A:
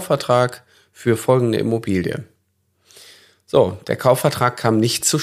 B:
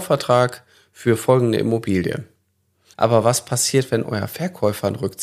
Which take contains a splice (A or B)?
B